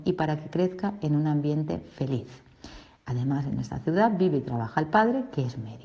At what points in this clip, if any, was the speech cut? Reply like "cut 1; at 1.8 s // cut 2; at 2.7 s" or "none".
none